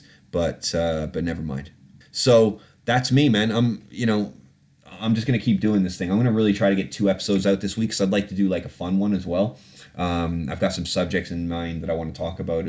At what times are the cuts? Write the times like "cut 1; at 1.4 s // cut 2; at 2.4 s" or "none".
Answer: cut 1; at 2.0 s